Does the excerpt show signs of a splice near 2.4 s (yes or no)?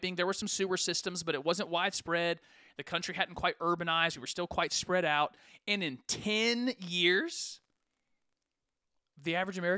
no